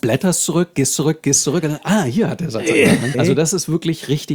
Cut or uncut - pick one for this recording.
cut